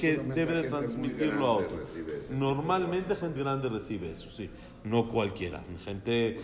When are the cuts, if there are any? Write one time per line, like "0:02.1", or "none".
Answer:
0:03.4

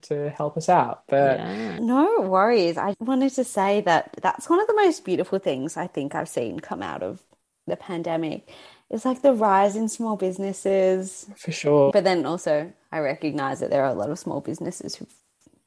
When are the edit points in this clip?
0:02.9
0:11.9

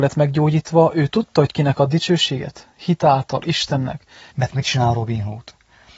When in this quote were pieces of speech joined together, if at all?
0:04.3

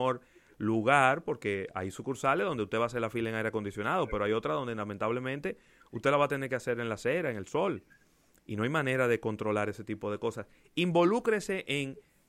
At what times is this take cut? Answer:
none

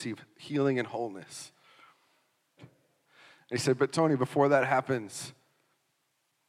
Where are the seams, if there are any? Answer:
0:02.6

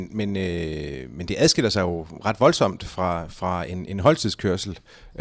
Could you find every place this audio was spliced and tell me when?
none

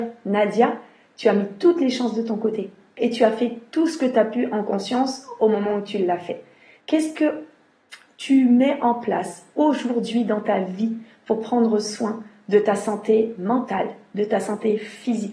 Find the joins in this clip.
0:06.8

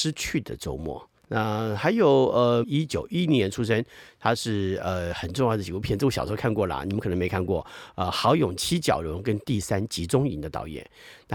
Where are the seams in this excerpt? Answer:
0:01.2
0:02.6

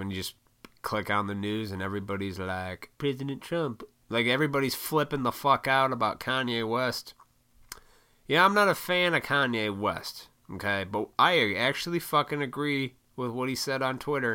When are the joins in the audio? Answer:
0:03.0

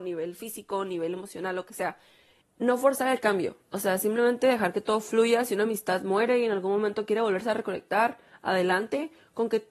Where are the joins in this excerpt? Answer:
0:02.4

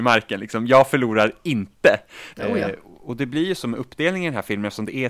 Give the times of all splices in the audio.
0:02.3

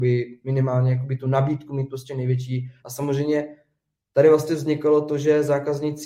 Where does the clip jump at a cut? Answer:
none

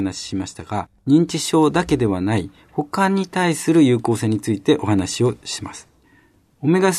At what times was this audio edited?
none

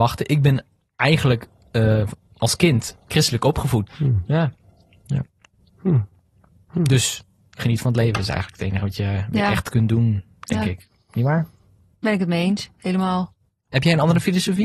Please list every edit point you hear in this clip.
0:03.9

